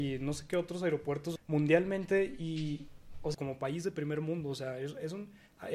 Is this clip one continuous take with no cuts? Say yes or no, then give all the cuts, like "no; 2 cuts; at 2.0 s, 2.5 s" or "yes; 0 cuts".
no; 2 cuts; at 1.4 s, 3.3 s